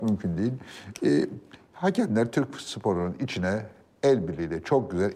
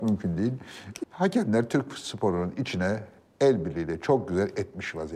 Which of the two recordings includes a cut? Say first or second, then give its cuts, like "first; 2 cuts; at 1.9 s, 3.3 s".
second; 1 cut; at 1.0 s